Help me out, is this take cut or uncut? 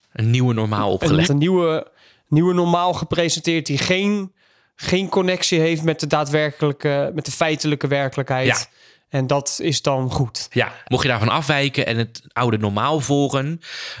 cut